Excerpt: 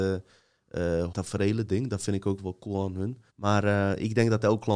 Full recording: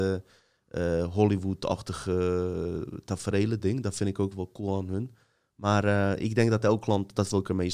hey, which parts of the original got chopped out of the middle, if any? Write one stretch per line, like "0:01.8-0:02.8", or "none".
0:01.1-0:03.0
0:05.2-0:05.5